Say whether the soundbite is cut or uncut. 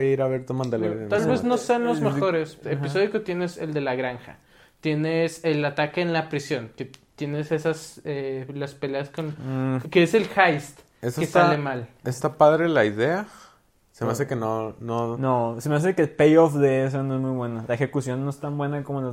cut